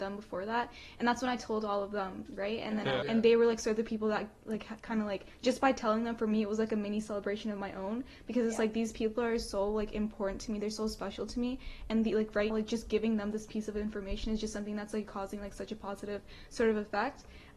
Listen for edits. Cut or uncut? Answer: cut